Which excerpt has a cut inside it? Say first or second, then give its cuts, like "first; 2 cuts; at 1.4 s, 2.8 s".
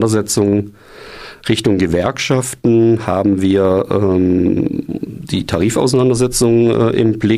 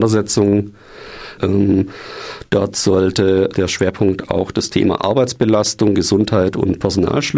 second; 2 cuts; at 1.4 s, 3.5 s